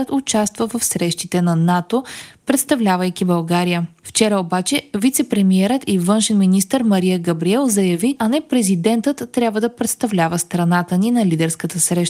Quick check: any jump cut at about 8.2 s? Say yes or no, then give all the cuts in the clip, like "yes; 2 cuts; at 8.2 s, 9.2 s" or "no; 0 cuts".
yes; 1 cut; at 8.2 s